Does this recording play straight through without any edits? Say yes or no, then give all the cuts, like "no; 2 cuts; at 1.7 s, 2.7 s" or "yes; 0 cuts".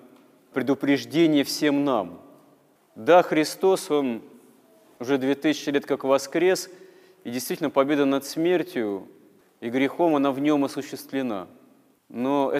yes; 0 cuts